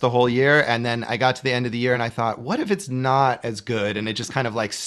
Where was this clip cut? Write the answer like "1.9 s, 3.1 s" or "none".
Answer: none